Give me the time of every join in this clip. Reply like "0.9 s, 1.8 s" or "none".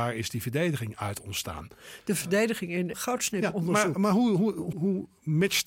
2.9 s, 4.7 s